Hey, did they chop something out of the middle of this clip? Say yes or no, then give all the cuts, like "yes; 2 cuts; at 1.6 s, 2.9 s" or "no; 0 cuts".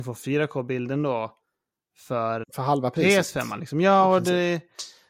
yes; 1 cut; at 2.4 s